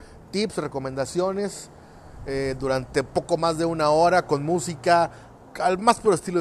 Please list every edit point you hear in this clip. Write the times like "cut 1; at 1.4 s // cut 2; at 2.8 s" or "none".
none